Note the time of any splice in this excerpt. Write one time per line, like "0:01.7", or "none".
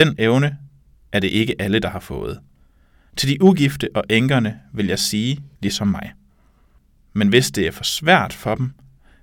0:03.1
0:05.5